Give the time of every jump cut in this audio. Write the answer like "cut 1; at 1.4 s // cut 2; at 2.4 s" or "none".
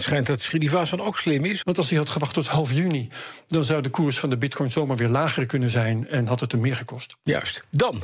cut 1; at 1.6 s